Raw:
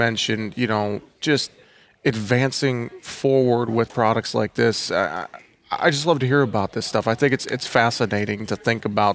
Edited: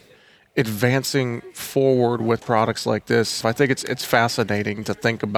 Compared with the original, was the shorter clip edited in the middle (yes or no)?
yes